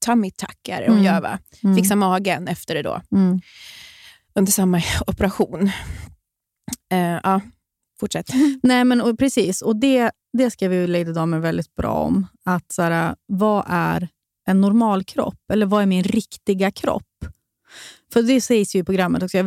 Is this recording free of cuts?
yes; 0 cuts

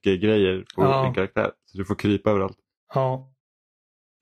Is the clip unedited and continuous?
yes; 0 cuts

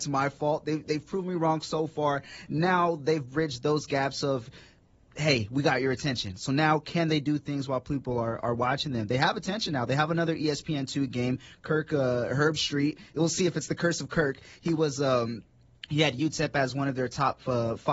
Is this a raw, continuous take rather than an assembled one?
yes; 0 cuts

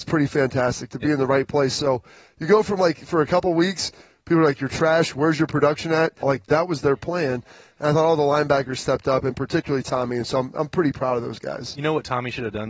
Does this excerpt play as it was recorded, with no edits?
no; 1 cut; at 6.2 s

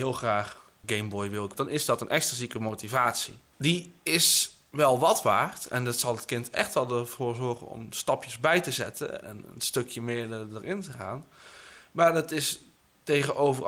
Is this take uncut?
yes; 0 cuts

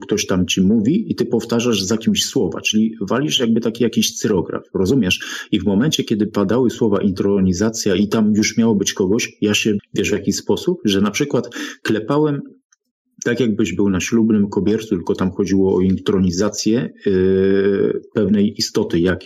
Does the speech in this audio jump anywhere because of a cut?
yes; 1 cut; at 9.8 s

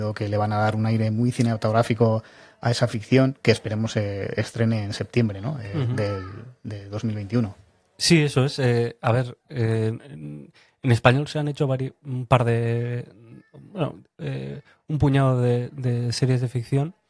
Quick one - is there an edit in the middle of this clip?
no; 0 cuts

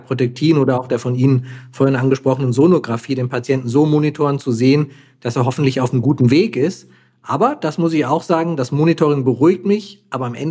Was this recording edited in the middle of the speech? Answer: no; 0 cuts

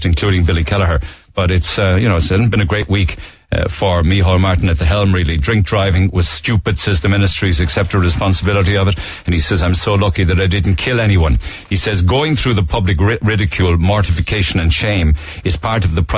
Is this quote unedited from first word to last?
yes; 0 cuts

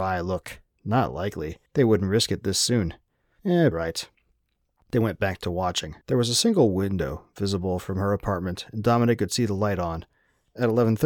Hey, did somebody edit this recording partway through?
yes; 3 cuts; at 1.7 s, 3.7 s, 6.0 s

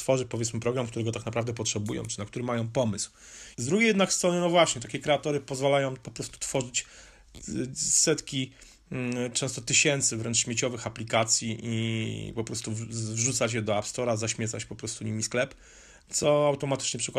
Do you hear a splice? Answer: yes; 1 cut; at 3.5 s

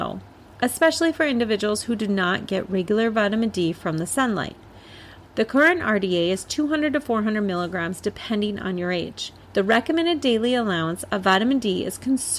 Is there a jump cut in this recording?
yes; 2 cuts; at 5.2 s, 9.4 s

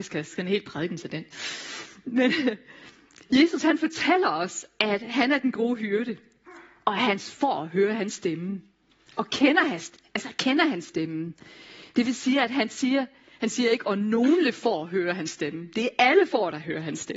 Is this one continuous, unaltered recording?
yes; 0 cuts

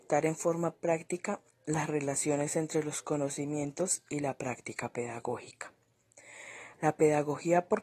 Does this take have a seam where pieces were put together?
yes; 1 cut; at 6.7 s

